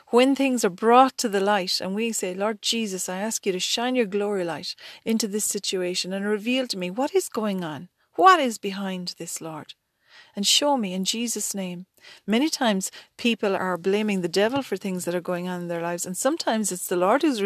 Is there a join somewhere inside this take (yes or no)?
yes